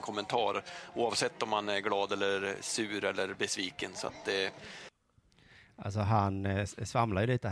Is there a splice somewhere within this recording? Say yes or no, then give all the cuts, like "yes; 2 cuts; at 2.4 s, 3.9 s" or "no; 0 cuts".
no; 0 cuts